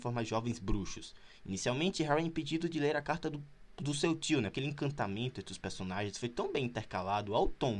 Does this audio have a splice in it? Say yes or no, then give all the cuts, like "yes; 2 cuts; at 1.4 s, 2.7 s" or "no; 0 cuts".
yes; 1 cut; at 4.5 s